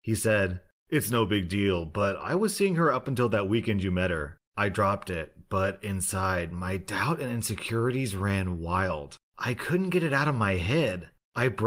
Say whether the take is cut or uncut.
uncut